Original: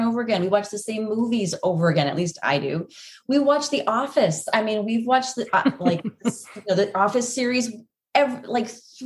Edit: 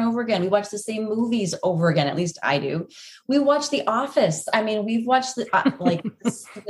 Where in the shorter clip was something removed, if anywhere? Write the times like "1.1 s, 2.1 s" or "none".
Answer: none

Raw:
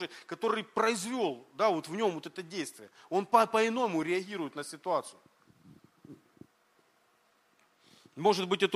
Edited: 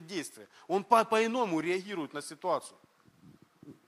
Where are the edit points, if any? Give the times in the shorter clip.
none

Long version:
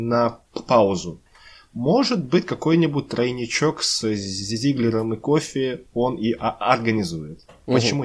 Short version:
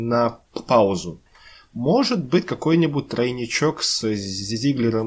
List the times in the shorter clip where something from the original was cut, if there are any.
none

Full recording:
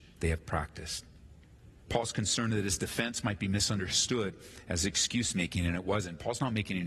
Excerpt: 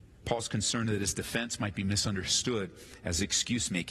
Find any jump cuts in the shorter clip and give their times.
none

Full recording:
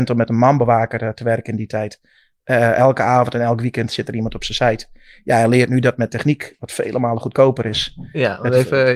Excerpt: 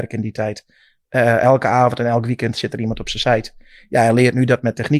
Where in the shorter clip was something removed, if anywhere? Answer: none

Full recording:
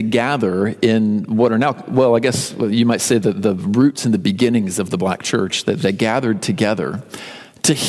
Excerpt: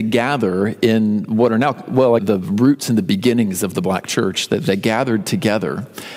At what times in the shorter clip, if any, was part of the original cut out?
2.2 s

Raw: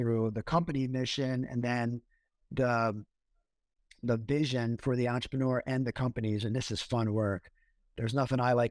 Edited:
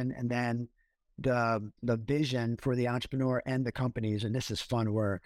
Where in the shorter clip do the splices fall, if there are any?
1.8 s

